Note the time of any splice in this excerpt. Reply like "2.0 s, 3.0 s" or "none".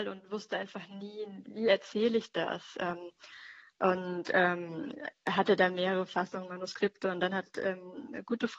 1.5 s